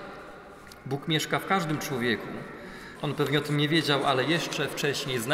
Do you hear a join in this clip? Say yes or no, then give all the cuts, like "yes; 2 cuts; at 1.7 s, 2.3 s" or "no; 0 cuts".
yes; 1 cut; at 3.0 s